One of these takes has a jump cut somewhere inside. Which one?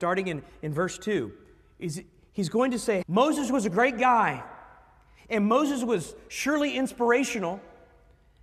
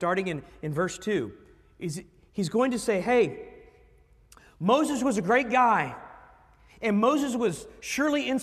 first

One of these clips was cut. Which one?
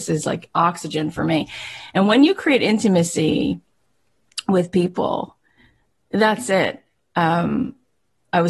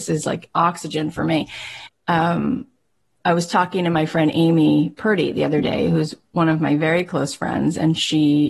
second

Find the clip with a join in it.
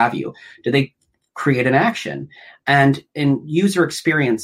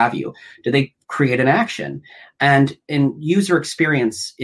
second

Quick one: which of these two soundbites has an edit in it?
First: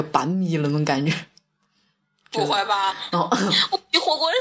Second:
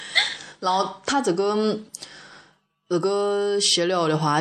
first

